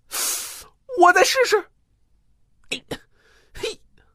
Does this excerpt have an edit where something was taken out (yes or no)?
no